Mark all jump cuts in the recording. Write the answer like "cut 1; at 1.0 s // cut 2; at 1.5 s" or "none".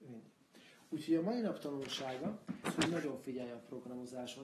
cut 1; at 2.6 s

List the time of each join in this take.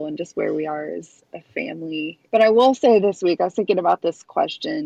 cut 1; at 2.3 s

